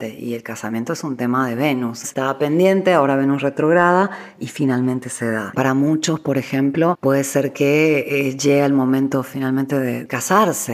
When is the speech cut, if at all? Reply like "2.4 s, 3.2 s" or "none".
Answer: 2.0 s, 5.5 s